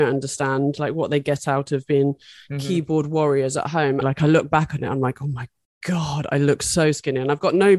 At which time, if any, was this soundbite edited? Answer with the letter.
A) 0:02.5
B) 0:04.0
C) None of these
B